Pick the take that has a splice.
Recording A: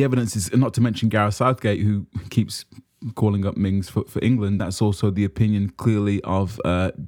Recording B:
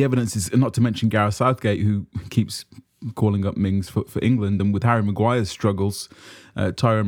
A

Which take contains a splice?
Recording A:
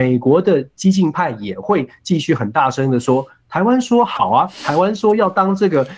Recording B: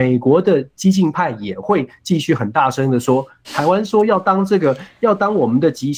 B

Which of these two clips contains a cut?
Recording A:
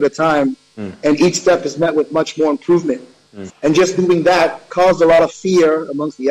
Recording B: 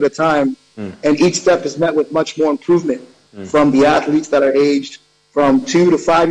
A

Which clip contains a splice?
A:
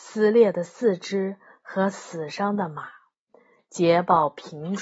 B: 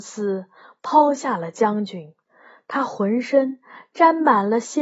A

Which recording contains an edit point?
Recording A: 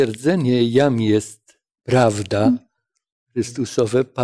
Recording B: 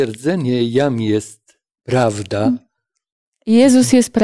B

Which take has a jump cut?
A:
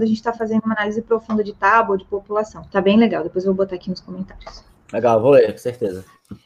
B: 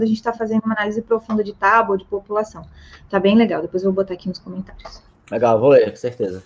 A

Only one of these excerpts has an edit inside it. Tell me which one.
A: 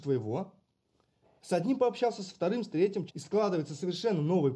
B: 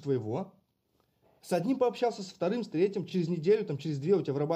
A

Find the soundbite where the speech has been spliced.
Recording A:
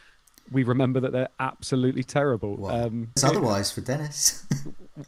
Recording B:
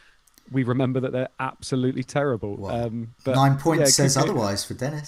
A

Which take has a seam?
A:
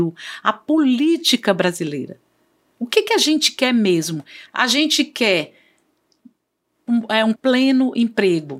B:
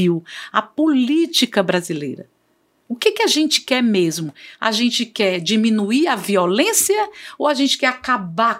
A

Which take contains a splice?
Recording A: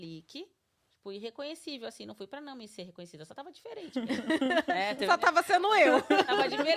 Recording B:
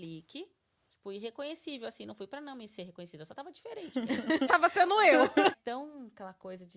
B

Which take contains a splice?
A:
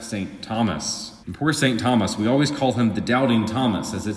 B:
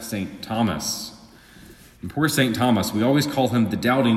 A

